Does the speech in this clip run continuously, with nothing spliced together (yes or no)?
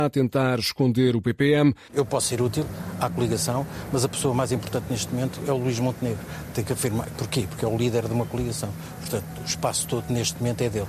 no